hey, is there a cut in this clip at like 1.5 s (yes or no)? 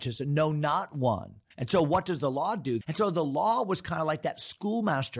yes